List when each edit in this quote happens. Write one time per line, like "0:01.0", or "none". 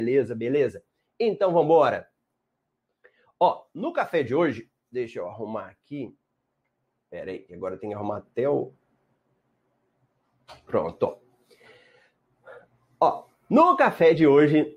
none